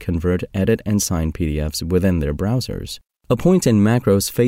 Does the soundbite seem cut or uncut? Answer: uncut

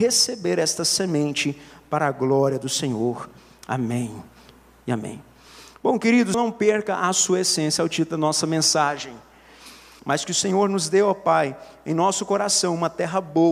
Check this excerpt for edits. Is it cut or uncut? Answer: cut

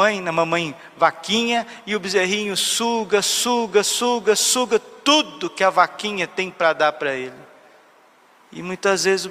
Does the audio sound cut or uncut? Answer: uncut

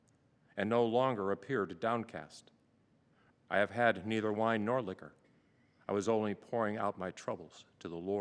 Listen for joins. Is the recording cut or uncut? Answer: cut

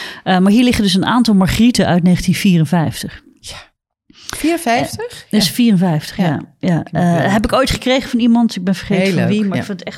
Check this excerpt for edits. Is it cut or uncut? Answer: uncut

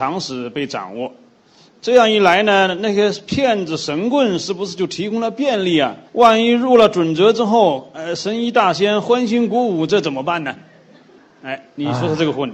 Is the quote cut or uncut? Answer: cut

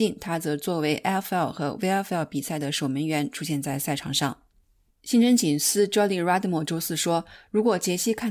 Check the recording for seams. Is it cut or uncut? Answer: cut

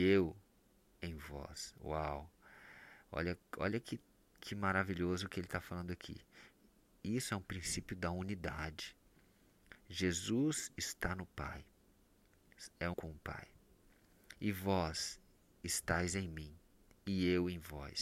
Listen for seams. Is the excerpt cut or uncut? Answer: cut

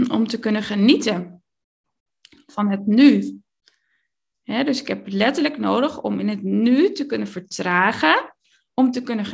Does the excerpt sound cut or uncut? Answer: uncut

